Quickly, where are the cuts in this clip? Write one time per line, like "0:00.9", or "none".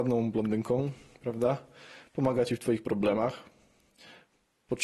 none